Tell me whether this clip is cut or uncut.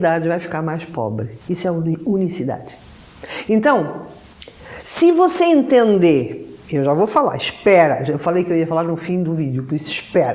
cut